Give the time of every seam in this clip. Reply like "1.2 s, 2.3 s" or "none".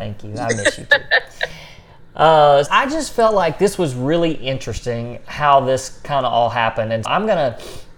2.7 s, 7.0 s

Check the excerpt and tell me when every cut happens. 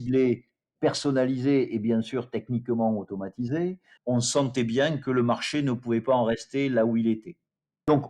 4.0 s

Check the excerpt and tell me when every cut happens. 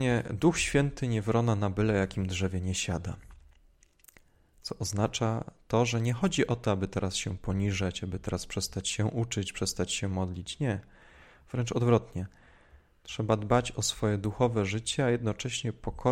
none

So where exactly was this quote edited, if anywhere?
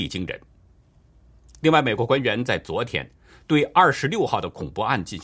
none

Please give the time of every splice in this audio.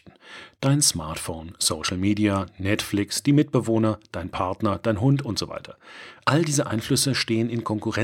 none

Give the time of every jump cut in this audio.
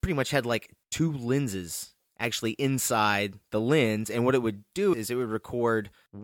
4.9 s

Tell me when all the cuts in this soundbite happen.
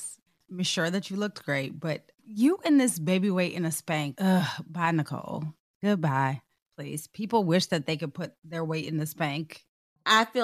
4.1 s

